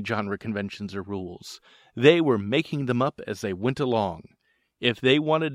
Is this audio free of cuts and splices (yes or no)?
yes